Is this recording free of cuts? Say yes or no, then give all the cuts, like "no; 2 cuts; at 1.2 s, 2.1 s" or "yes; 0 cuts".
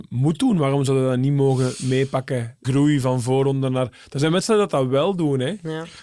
no; 1 cut; at 2.6 s